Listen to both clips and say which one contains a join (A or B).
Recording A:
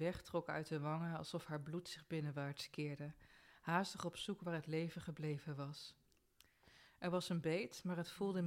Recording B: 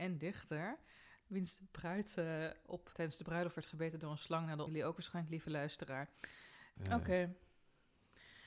B